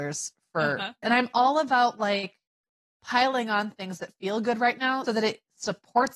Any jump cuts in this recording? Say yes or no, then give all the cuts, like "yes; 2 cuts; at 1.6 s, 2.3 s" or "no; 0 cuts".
yes; 2 cuts; at 1.0 s, 5.1 s